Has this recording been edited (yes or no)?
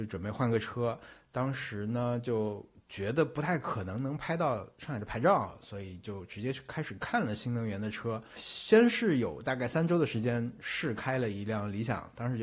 no